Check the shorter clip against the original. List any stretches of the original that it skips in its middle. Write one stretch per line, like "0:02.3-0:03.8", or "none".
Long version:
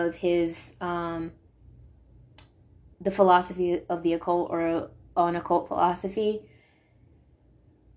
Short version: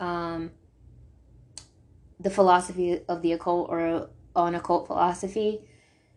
none